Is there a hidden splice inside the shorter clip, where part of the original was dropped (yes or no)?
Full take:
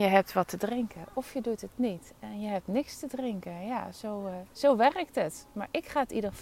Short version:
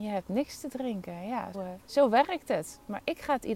yes